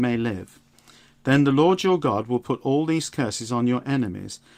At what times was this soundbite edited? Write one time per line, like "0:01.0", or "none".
none